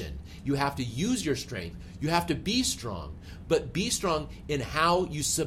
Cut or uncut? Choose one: uncut